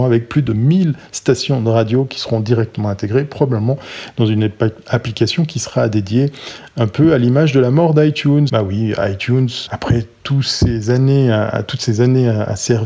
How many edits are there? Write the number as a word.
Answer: two